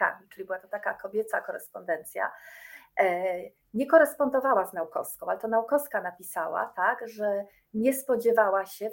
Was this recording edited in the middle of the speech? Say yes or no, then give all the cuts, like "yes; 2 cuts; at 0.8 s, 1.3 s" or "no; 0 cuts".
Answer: no; 0 cuts